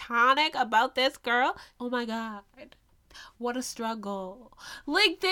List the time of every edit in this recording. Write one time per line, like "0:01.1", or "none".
0:01.7